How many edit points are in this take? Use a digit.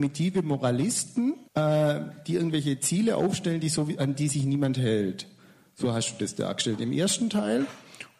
1